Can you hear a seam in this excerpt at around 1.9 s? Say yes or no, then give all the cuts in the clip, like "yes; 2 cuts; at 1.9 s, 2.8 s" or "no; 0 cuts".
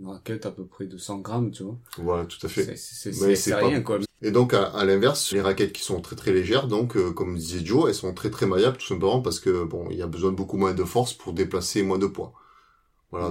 no; 2 cuts; at 4.0 s, 5.3 s